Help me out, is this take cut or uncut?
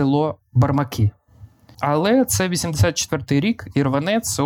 cut